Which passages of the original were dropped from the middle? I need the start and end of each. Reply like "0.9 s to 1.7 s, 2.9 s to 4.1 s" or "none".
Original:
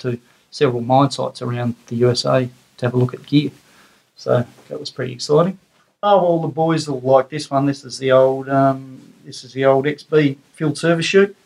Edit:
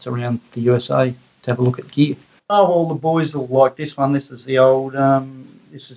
3.7 s to 5.9 s